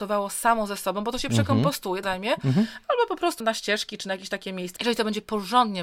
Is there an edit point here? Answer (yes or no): yes